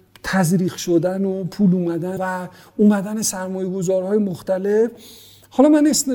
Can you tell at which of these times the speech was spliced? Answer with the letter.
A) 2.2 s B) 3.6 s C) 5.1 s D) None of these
A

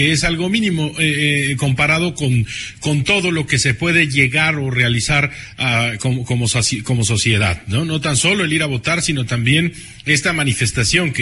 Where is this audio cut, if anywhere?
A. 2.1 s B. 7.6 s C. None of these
C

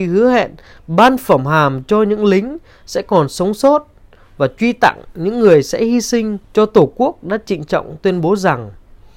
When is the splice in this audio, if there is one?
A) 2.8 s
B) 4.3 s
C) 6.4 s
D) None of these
C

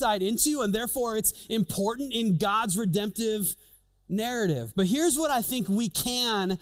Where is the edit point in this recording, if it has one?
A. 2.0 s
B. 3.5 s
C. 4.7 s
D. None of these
C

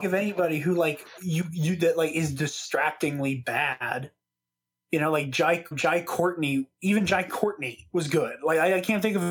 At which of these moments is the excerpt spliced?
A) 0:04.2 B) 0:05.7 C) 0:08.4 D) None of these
B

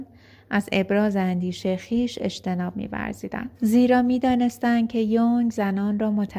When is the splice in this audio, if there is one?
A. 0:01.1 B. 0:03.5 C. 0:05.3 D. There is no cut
B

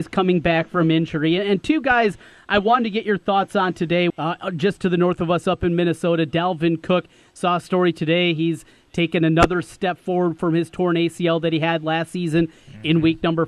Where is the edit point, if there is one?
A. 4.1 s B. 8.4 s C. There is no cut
A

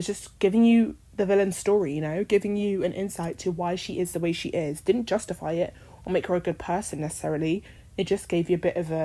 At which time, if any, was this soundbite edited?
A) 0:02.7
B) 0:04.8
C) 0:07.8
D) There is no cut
D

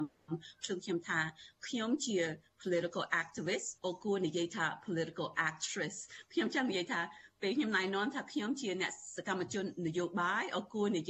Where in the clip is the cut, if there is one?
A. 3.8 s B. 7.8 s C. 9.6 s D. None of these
A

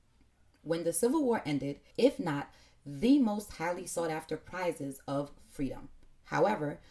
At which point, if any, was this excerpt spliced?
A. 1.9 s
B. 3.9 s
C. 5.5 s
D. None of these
A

